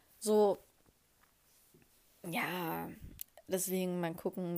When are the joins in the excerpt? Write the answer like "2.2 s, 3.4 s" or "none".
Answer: none

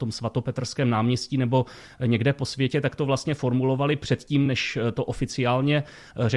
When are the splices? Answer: none

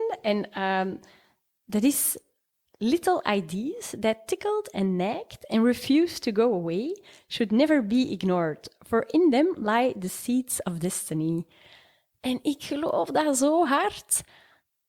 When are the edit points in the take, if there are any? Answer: none

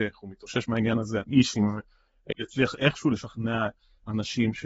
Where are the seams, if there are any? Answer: 1.2 s, 2.3 s

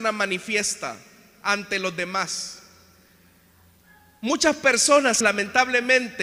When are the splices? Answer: 5.2 s

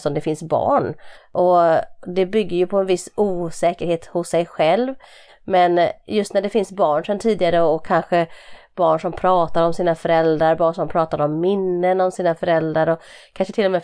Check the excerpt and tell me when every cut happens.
1.1 s, 5.3 s

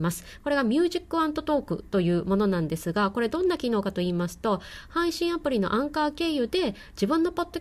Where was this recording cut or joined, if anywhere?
none

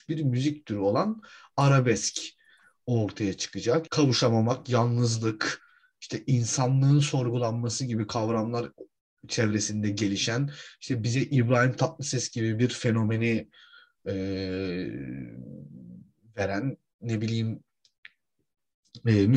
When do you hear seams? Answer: 3.9 s

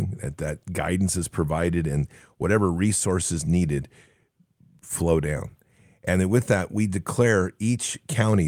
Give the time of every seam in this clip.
none

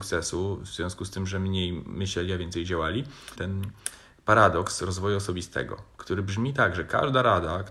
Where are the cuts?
3.4 s

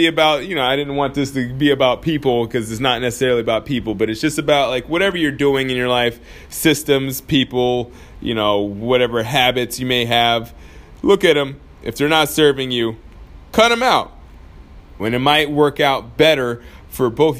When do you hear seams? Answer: 15.0 s

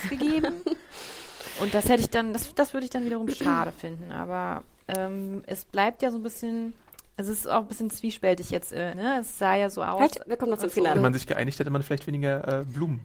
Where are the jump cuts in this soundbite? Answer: 8.9 s, 10.9 s

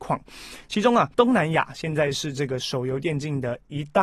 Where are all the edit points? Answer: none

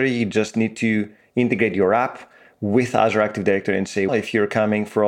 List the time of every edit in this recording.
4.1 s

